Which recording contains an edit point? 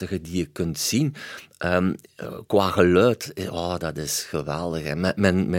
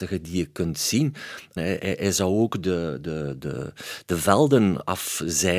second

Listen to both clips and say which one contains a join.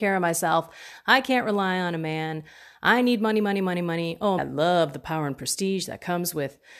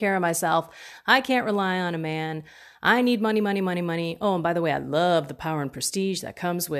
first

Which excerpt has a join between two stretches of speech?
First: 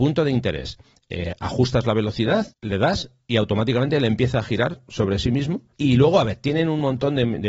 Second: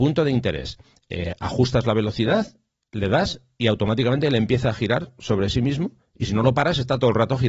first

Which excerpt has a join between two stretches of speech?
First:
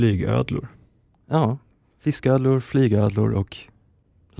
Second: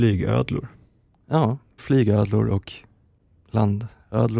second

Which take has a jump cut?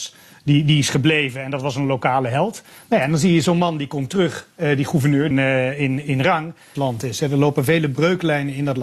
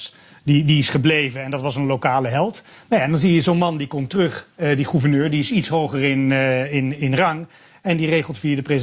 first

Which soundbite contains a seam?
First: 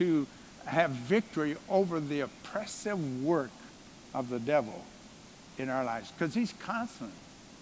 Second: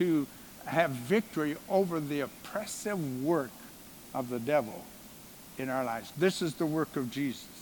second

